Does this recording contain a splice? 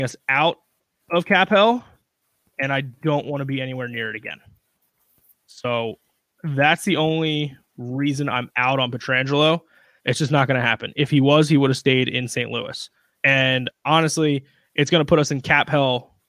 yes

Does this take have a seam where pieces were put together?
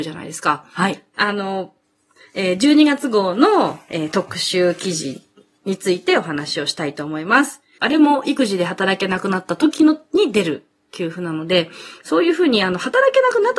yes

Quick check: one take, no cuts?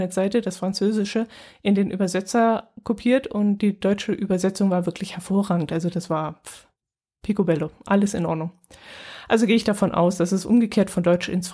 yes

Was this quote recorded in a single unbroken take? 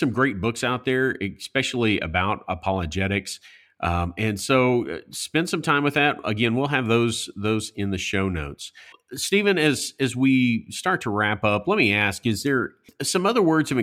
yes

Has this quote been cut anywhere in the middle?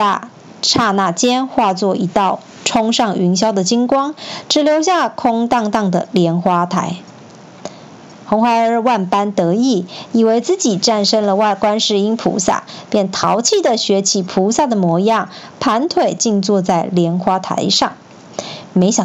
no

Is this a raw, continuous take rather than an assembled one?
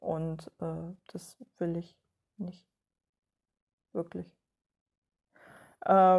yes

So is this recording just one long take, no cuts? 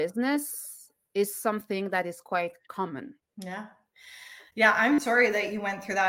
no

